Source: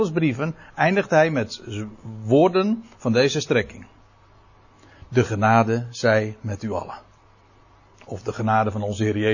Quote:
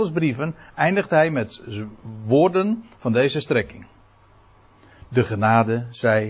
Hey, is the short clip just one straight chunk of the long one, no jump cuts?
yes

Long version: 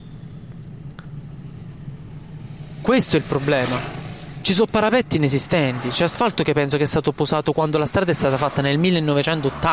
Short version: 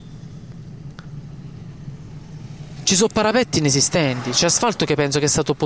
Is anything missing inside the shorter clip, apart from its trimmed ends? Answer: yes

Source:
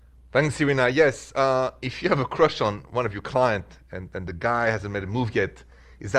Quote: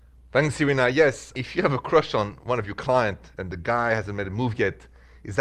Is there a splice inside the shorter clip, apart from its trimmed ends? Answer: yes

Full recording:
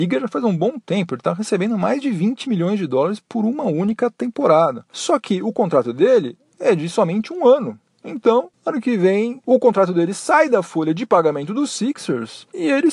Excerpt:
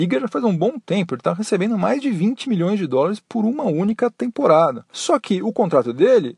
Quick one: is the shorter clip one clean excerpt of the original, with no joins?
yes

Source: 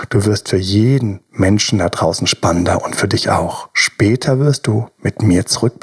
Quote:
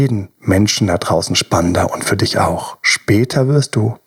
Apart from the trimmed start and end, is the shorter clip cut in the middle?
no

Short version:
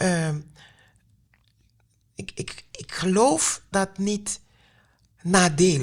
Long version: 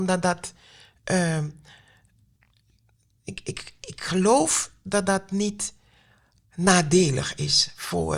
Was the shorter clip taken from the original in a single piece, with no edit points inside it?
no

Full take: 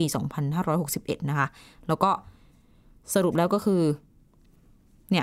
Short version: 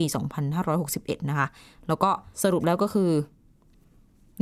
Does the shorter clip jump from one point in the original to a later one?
yes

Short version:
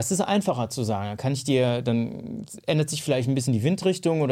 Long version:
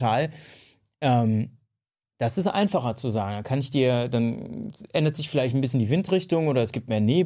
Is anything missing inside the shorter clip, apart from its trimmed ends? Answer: no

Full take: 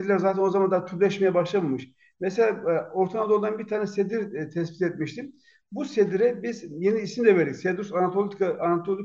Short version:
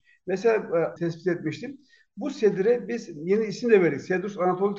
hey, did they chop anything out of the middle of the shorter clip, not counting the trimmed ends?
yes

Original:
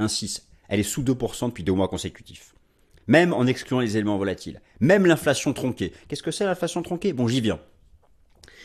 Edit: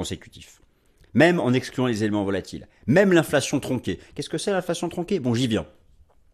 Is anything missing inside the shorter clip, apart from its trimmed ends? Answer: no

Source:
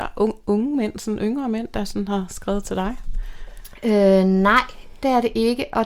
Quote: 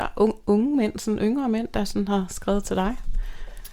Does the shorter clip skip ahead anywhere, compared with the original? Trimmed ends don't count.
no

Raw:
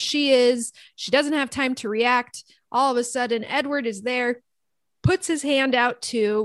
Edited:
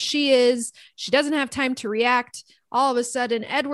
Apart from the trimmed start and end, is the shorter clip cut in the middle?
no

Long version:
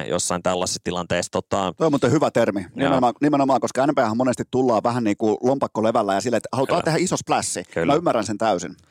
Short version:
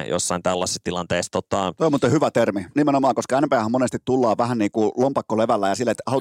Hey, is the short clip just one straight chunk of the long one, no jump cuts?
no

